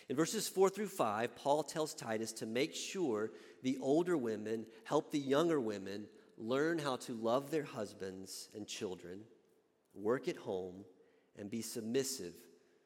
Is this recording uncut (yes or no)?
yes